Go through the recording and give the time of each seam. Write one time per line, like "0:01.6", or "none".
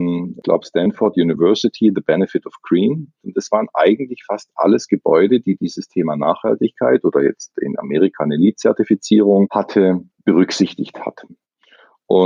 0:03.2
0:10.1